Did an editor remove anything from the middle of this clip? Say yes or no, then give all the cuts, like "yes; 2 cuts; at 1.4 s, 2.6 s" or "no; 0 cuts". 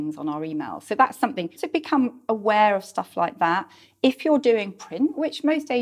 yes; 1 cut; at 1.6 s